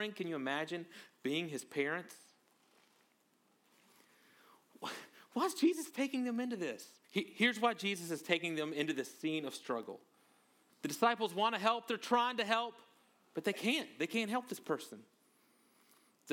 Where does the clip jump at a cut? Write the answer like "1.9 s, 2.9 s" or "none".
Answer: 7.0 s, 10.7 s

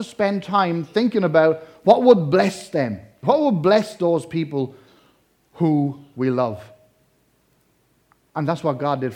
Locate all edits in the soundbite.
3.2 s

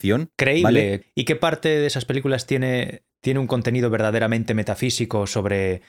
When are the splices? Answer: 1.0 s

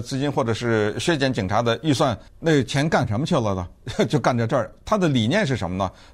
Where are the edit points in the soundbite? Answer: 2.3 s

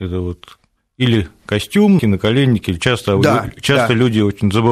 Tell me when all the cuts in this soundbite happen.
2.0 s

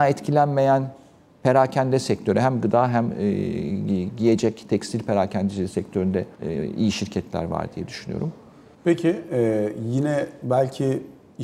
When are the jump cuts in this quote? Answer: 6.3 s, 8.7 s

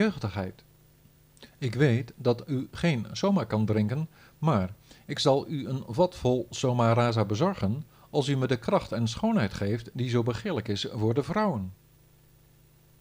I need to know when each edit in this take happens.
none

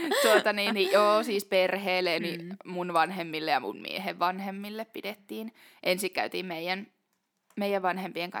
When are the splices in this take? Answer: 2.2 s

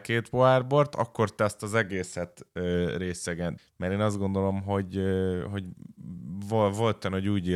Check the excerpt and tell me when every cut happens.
3.6 s

